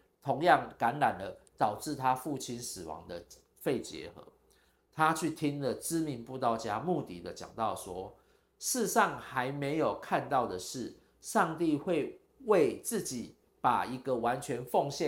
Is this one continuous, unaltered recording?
yes; 0 cuts

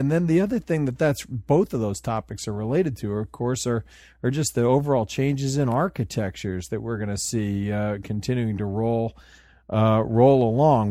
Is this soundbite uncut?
yes; 0 cuts

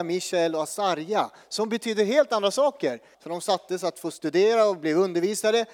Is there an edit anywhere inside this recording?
yes; 1 cut; at 3.1 s

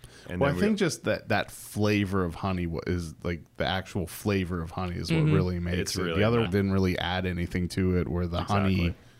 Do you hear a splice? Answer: yes; 1 cut; at 6.5 s

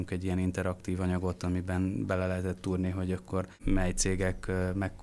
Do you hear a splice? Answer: no; 0 cuts

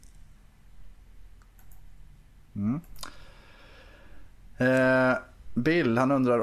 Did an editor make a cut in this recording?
no; 0 cuts

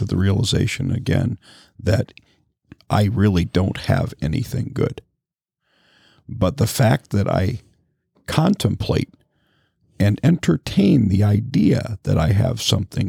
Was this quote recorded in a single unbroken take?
yes; 0 cuts

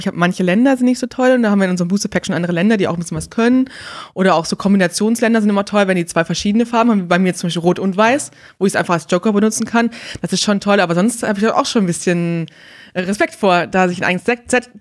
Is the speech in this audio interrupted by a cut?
no; 0 cuts

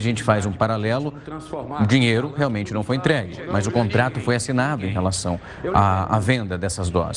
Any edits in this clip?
no; 0 cuts

